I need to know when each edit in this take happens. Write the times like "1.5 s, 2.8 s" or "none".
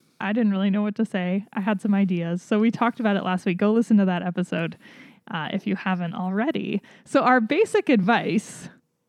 none